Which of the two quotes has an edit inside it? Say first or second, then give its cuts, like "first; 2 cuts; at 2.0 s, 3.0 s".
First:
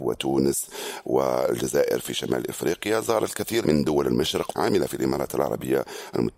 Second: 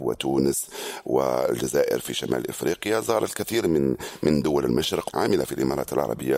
first; 1 cut; at 3.6 s